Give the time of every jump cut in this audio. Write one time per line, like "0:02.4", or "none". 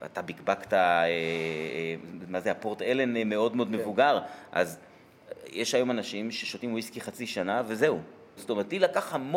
0:08.4

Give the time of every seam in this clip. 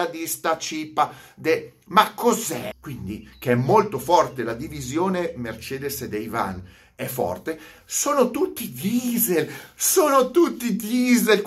0:02.7

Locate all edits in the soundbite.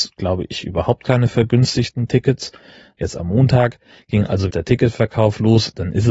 0:02.9
0:04.5

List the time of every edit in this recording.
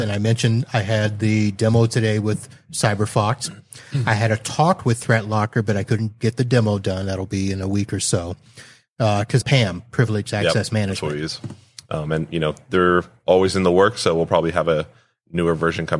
0:09.4
0:11.8

